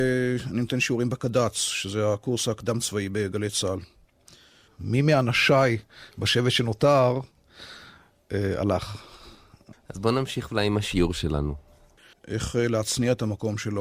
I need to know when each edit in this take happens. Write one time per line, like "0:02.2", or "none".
0:04.7
0:09.7
0:12.1